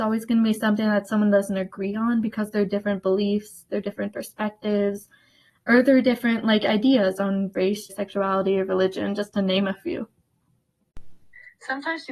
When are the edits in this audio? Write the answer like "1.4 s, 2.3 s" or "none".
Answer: 7.9 s